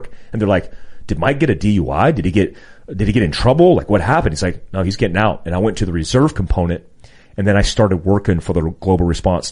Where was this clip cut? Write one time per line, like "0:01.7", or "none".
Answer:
none